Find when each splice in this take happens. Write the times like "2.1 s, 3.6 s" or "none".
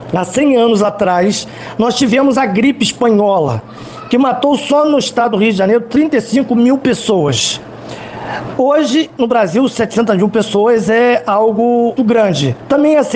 8.5 s, 12.0 s

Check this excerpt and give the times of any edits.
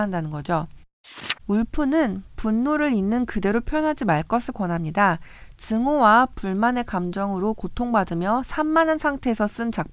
1.4 s

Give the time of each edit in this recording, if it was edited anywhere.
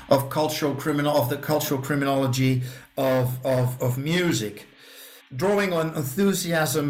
3.8 s, 5.2 s

